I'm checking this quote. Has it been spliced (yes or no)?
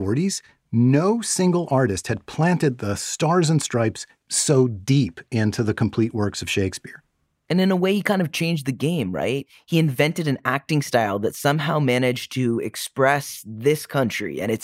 no